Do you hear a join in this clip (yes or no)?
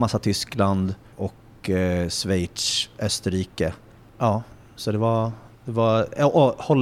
yes